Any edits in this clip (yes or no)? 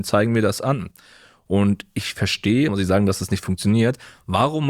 yes